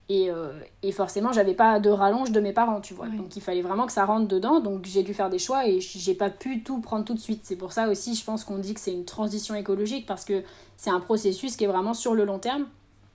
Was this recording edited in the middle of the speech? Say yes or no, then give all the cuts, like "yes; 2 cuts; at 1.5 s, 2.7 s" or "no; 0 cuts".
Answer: no; 0 cuts